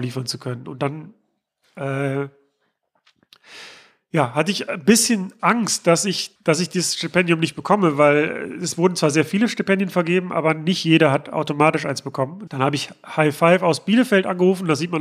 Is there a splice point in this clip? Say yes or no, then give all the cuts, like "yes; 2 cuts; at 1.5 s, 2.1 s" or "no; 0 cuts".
yes; 2 cuts; at 6.4 s, 12.5 s